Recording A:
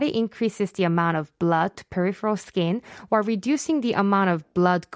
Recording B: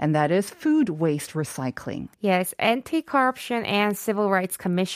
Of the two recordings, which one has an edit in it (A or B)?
B